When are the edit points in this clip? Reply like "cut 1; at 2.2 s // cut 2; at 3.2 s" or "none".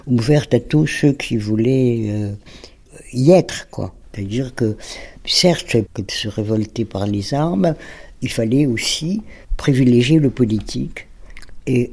cut 1; at 4.0 s // cut 2; at 5.9 s // cut 3; at 9.4 s